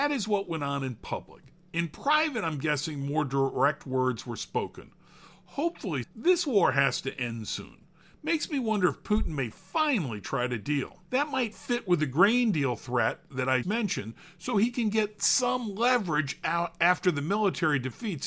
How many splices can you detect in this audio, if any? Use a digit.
3